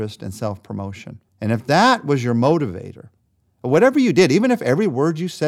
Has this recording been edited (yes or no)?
yes